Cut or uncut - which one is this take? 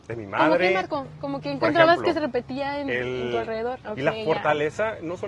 cut